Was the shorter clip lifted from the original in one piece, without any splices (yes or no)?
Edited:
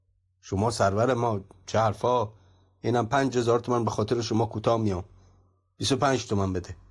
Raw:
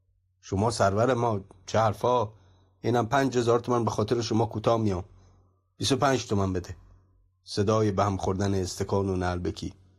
yes